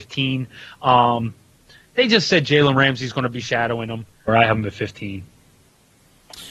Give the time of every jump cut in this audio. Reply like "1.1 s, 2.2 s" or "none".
4.3 s